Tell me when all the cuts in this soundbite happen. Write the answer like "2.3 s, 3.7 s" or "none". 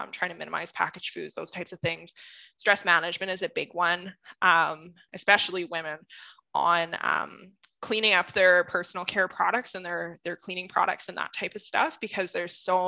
5.1 s